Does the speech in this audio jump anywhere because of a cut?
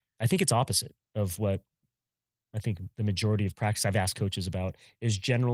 no; 0 cuts

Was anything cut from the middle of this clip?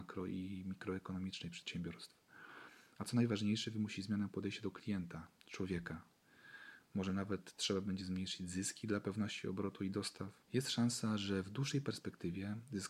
yes; 1 cut; at 10.4 s

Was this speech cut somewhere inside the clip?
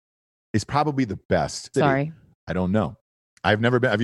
yes; 1 cut; at 1.7 s

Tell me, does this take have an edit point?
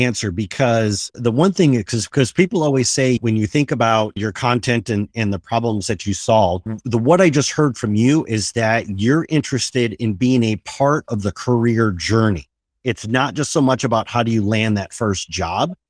no; 0 cuts

